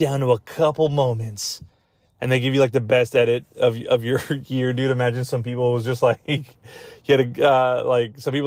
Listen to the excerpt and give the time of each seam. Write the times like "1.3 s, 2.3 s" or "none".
none

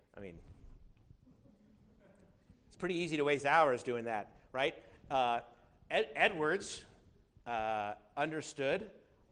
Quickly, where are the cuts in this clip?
none

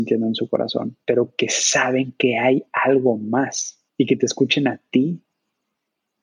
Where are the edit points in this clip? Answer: 1.0 s, 3.9 s

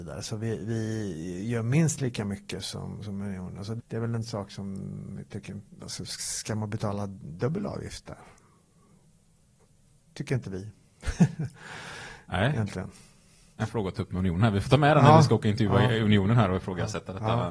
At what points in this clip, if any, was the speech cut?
3.8 s

